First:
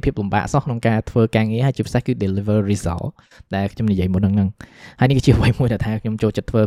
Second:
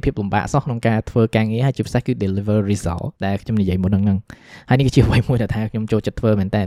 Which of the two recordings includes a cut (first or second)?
second